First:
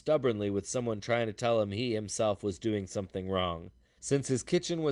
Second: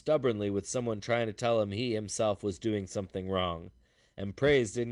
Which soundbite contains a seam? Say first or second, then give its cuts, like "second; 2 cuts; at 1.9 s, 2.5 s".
first; 1 cut; at 4.0 s